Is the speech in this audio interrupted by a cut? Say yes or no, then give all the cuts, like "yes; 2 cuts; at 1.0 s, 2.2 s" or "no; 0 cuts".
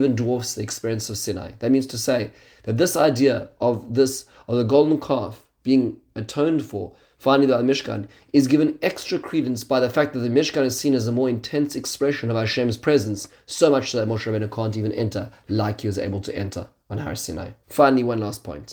yes; 1 cut; at 17.6 s